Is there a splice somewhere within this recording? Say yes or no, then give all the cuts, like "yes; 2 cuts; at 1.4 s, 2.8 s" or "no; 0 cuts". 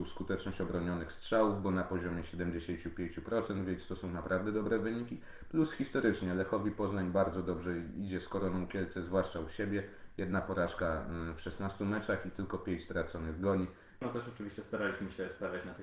yes; 1 cut; at 14.0 s